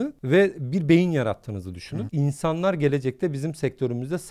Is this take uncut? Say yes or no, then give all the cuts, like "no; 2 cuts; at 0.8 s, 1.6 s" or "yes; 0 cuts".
no; 1 cut; at 2.1 s